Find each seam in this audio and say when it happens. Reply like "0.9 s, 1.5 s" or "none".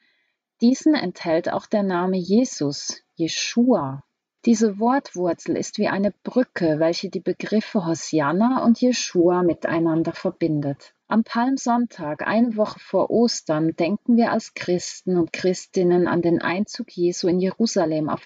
4.4 s, 11.0 s

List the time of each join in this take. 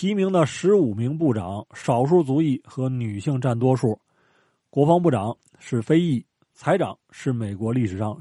none

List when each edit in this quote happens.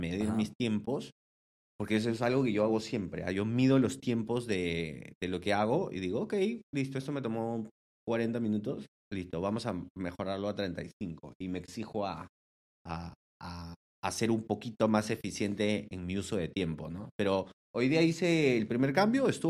none

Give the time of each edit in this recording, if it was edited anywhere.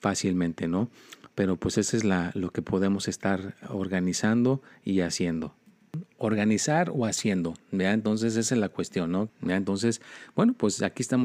9.3 s

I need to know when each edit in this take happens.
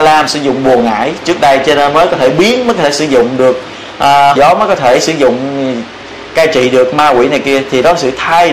4.4 s

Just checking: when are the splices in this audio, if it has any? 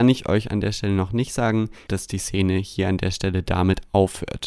1.9 s

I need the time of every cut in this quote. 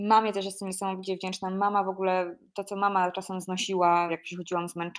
4.1 s

